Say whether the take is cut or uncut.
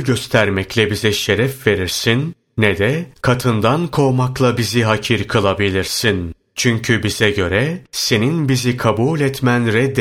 uncut